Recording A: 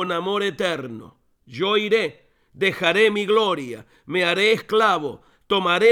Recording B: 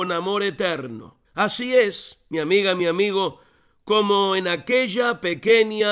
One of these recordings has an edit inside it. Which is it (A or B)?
B